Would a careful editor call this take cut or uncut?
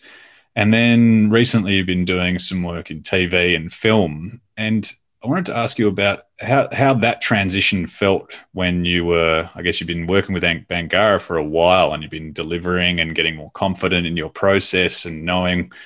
uncut